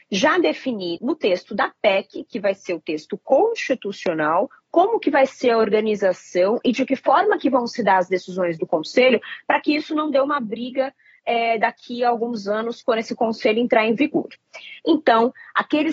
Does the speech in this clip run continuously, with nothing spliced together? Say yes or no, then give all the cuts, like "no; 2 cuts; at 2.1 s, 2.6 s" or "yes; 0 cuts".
no; 2 cuts; at 1.0 s, 14.8 s